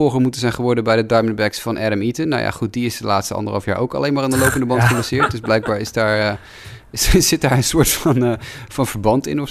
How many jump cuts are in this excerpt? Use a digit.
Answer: 0